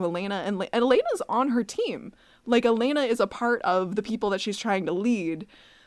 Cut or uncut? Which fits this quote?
uncut